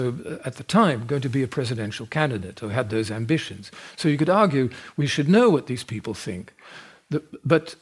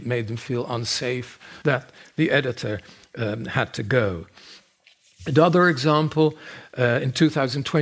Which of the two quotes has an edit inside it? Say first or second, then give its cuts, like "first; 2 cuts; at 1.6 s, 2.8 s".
second; 1 cut; at 1.6 s